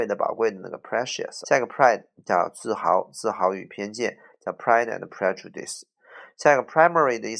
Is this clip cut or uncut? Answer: cut